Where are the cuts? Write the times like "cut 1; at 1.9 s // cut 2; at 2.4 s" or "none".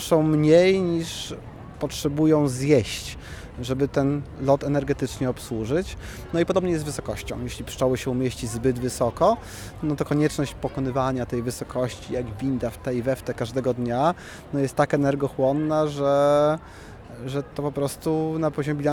none